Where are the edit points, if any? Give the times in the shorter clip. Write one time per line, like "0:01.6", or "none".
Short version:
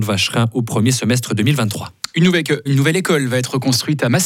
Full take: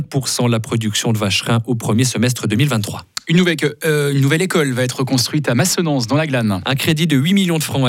0:02.7